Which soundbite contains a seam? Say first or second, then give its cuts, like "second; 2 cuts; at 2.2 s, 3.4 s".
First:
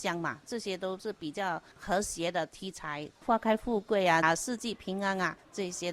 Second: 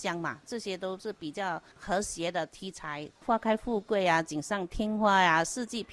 first; 1 cut; at 4.2 s